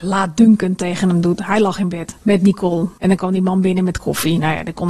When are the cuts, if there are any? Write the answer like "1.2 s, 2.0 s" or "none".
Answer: none